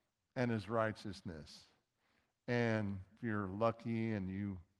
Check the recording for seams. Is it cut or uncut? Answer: cut